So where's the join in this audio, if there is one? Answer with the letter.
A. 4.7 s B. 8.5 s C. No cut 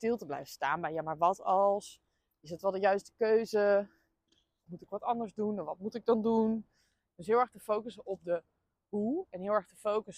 A